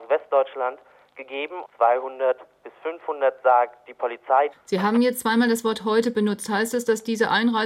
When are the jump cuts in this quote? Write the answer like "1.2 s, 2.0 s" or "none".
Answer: 1.6 s, 4.5 s